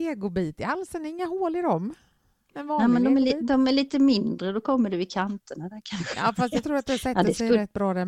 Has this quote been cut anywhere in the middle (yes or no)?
no